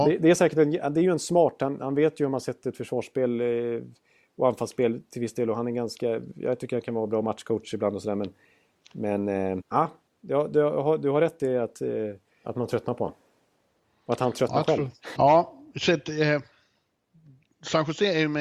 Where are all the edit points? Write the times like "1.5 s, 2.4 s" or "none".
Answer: 9.6 s, 12.4 s, 15.2 s